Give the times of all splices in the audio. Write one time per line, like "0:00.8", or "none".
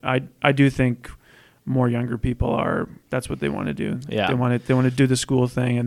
none